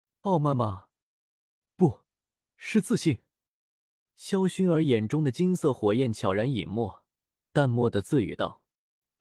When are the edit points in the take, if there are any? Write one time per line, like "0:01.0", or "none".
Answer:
none